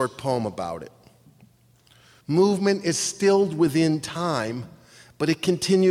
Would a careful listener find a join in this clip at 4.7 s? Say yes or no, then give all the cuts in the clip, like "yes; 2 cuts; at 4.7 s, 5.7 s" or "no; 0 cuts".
no; 1 cut; at 2.2 s